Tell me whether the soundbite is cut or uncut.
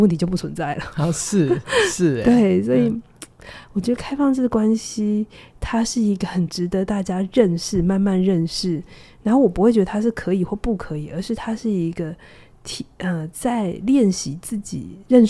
uncut